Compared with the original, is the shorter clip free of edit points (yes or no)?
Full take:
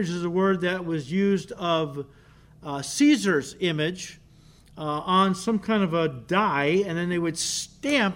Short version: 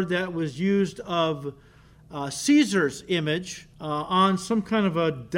no